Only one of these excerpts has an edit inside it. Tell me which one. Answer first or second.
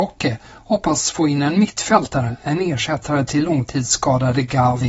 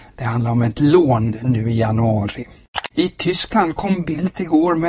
second